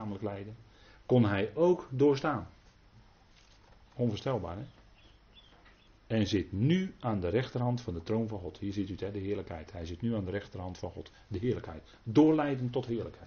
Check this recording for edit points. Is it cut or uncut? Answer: cut